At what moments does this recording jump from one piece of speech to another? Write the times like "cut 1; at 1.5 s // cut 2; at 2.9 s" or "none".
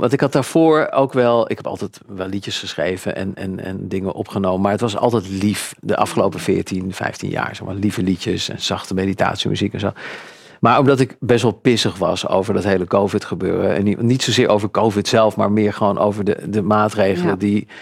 none